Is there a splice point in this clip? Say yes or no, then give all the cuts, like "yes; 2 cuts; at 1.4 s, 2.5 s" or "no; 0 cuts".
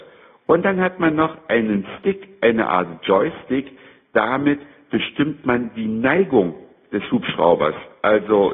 no; 0 cuts